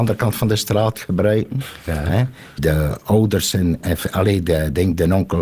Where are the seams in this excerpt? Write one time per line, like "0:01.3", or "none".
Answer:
0:02.6